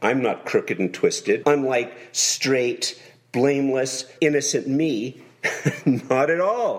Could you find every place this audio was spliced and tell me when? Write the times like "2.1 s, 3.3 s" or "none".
1.4 s, 4.2 s